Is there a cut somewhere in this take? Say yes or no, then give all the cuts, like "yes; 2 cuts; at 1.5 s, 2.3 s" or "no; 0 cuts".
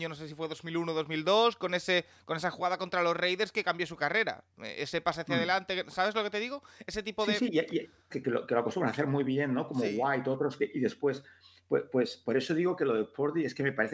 yes; 1 cut; at 8.1 s